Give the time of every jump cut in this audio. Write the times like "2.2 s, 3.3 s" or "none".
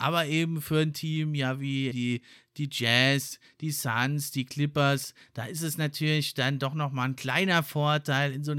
1.9 s